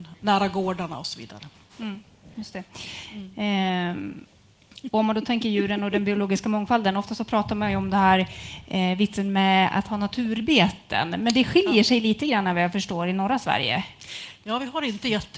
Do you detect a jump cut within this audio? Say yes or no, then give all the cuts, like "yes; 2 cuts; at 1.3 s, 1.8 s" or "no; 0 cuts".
no; 0 cuts